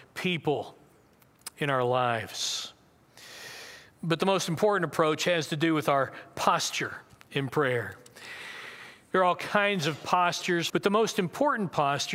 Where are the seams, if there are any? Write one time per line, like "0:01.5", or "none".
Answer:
0:09.1
0:10.7